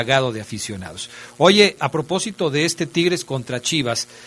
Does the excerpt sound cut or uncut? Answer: cut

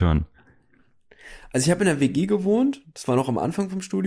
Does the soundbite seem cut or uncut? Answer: uncut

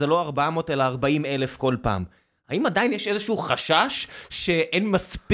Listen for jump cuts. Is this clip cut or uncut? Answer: uncut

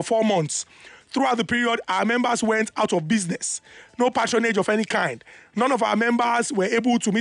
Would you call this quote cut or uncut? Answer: uncut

